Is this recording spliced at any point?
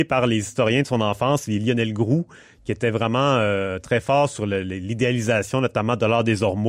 no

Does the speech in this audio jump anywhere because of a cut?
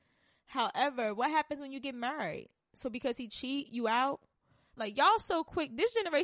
yes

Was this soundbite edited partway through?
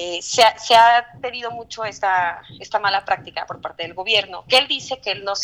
no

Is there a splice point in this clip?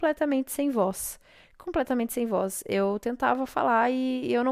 no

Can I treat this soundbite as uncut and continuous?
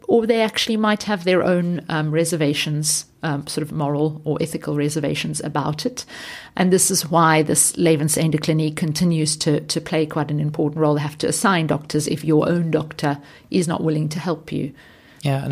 yes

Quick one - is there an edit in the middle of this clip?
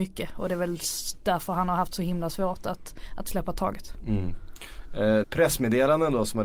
yes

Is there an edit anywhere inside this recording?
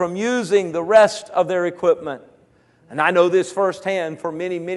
no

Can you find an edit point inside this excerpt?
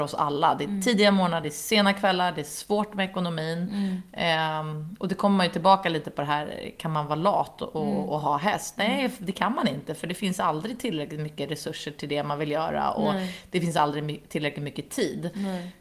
no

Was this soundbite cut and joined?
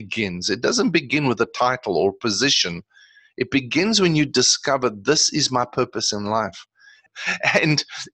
yes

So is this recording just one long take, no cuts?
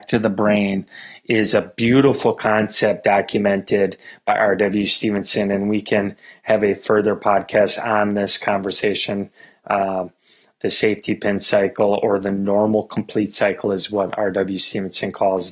yes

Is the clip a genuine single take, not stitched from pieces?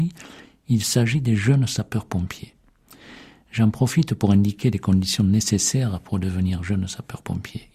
yes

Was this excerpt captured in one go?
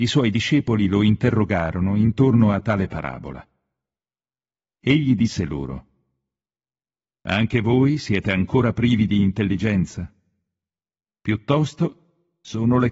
no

